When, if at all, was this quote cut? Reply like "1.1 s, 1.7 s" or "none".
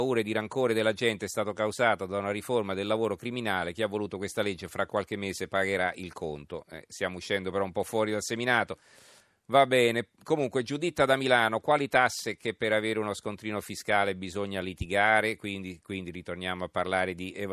none